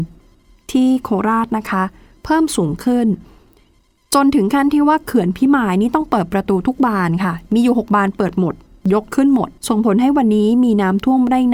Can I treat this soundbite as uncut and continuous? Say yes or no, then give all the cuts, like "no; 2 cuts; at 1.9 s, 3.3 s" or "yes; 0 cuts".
no; 1 cut; at 9.6 s